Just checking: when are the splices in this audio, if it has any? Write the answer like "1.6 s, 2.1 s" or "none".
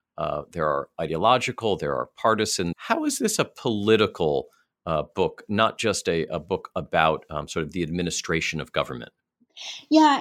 2.7 s